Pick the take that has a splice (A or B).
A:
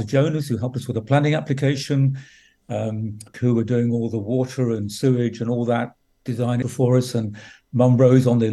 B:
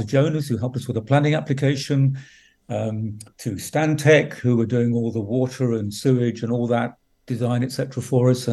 A